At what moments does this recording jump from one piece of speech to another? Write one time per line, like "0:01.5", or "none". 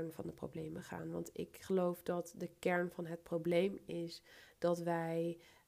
none